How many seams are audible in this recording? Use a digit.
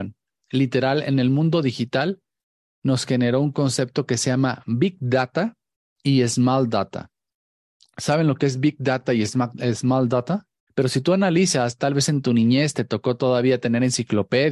1